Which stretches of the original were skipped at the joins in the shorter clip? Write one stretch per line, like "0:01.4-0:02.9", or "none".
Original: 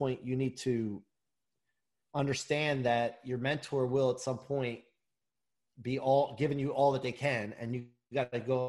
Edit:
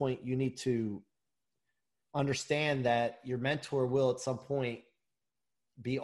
none